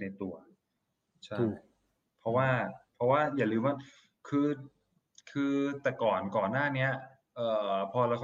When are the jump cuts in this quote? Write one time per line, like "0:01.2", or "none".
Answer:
none